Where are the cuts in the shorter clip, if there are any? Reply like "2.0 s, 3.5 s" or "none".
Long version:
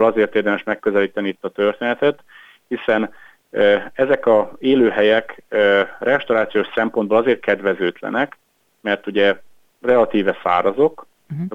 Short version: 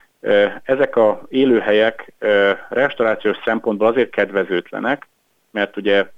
none

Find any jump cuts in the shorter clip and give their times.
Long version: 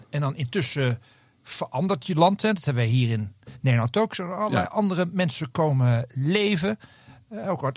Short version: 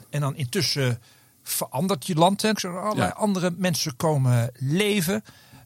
2.5 s

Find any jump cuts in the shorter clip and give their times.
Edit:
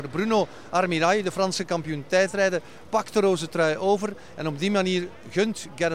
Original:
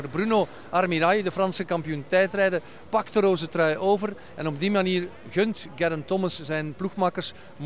none

